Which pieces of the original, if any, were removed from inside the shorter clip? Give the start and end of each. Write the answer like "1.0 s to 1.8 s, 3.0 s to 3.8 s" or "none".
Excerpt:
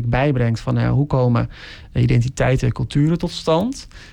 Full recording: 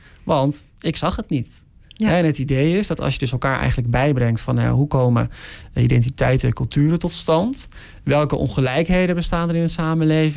none